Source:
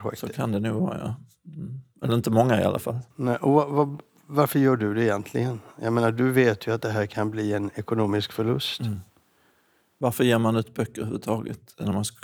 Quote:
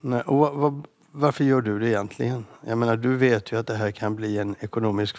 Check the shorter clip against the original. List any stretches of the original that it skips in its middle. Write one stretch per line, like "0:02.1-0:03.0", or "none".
none